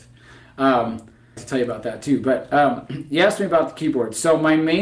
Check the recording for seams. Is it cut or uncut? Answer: cut